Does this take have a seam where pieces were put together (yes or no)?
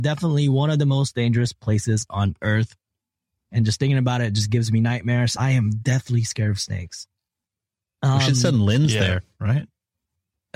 no